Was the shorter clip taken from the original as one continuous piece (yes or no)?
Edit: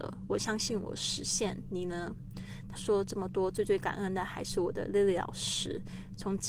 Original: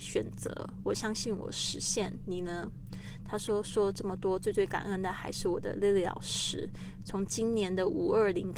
no